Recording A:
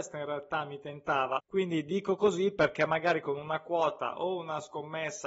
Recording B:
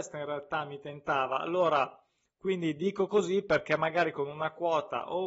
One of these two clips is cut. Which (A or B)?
A